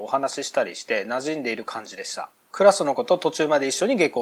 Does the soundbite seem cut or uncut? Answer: uncut